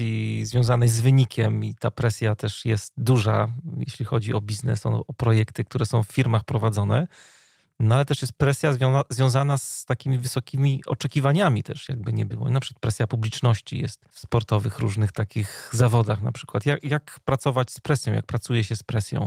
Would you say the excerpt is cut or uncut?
uncut